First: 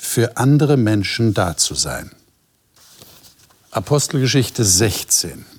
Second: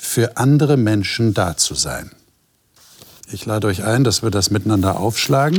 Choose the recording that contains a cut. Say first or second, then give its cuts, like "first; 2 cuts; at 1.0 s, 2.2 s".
second; 1 cut; at 3.2 s